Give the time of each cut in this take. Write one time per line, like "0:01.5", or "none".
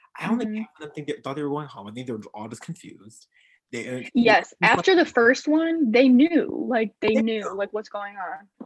none